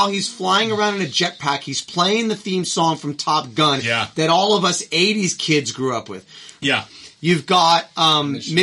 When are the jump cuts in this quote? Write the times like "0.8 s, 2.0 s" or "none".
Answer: 6.6 s